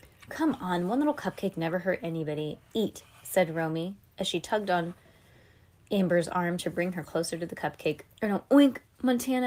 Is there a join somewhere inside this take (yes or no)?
yes